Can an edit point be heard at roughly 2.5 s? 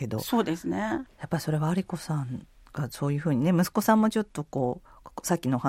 no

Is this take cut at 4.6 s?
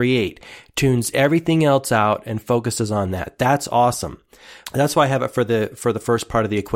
yes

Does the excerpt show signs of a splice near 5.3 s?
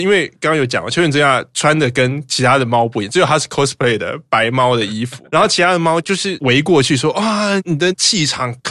no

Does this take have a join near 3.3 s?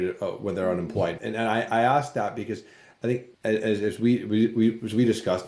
yes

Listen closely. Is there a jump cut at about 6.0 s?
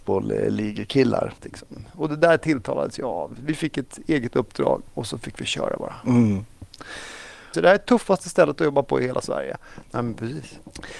no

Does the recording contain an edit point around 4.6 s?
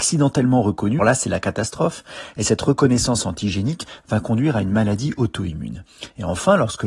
no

